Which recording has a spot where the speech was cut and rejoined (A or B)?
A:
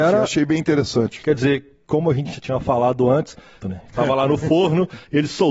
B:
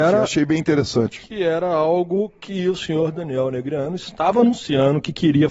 A